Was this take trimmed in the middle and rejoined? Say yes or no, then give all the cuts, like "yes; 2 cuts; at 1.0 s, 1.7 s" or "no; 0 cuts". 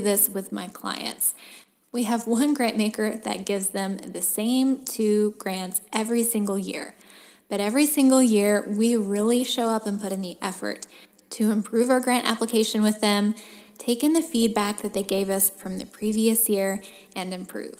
no; 0 cuts